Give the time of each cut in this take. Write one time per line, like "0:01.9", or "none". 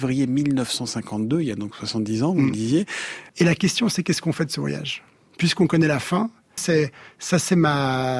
0:03.3
0:06.6